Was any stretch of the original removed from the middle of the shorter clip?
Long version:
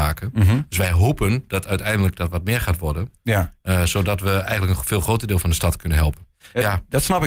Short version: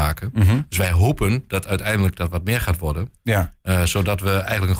no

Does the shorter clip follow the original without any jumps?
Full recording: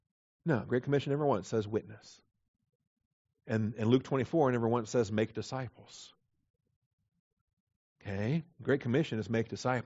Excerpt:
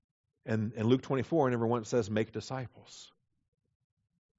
yes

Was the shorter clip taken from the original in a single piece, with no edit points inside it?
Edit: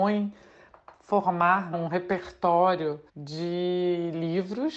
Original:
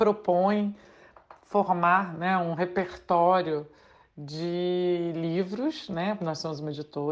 no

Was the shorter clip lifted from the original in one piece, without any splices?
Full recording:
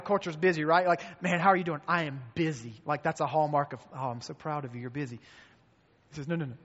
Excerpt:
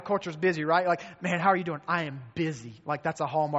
yes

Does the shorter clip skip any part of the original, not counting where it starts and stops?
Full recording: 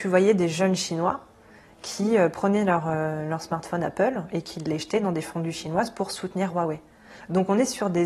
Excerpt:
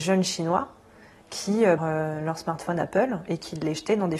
yes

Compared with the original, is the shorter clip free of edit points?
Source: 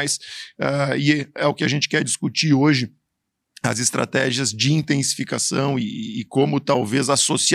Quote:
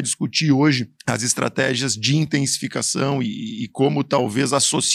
no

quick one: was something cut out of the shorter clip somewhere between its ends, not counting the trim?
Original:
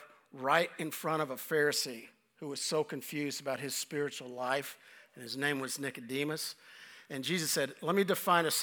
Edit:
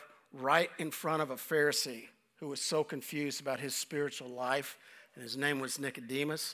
no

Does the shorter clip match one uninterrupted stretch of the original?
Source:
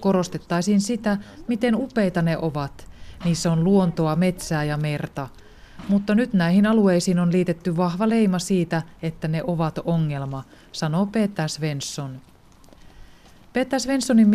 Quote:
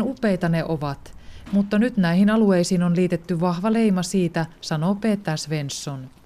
no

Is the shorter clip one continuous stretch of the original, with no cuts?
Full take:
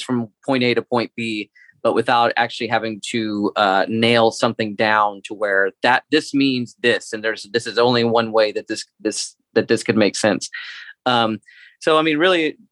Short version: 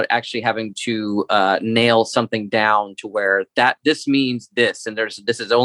yes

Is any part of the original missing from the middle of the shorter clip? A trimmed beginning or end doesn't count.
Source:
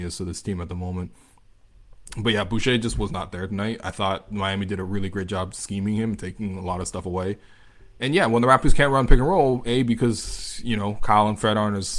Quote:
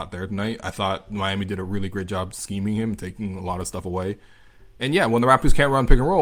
no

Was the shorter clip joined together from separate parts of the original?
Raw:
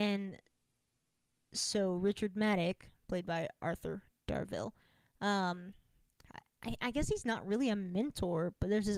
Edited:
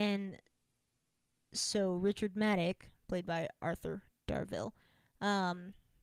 no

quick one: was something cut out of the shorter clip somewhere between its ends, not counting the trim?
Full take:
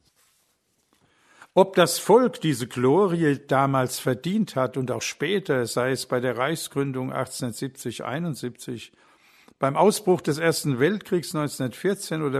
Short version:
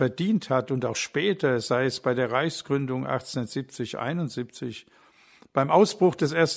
no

